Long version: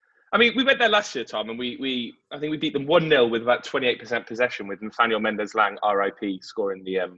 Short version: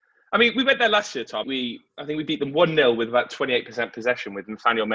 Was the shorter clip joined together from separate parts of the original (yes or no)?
yes